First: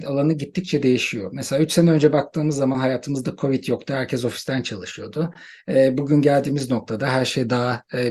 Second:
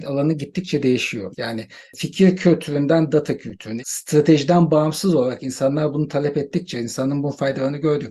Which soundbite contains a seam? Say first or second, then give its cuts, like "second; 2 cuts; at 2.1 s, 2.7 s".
second; 2 cuts; at 1.3 s, 3.8 s